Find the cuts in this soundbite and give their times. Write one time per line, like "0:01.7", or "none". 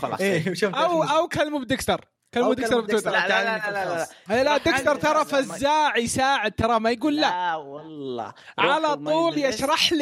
none